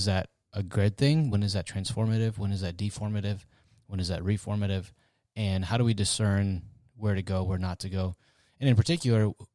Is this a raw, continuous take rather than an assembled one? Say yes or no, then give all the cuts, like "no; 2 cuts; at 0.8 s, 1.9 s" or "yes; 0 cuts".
yes; 0 cuts